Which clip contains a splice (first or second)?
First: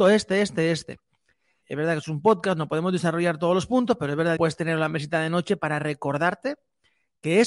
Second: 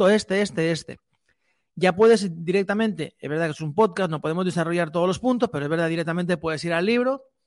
first